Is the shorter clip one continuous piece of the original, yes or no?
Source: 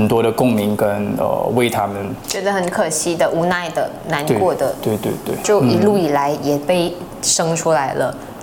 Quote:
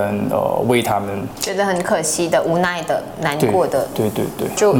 yes